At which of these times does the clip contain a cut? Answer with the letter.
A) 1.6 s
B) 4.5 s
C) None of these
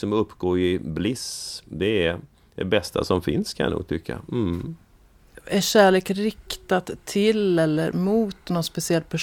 C